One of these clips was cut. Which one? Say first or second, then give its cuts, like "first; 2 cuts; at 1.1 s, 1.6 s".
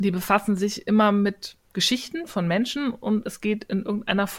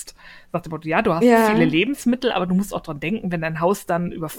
first; 1 cut; at 1.6 s